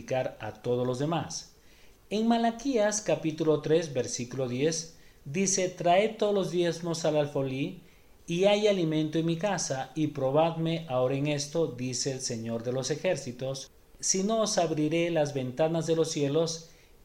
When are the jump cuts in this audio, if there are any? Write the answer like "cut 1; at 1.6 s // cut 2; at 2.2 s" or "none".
none